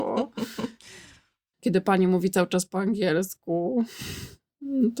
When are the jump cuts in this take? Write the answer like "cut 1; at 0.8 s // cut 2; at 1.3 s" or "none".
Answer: cut 1; at 1.5 s